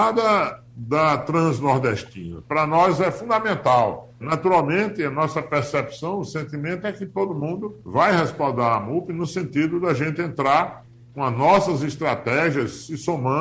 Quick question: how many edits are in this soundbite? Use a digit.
2